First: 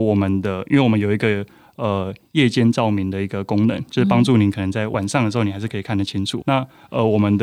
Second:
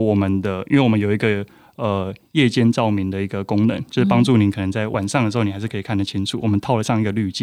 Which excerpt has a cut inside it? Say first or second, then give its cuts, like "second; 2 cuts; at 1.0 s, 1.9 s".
first; 1 cut; at 6.4 s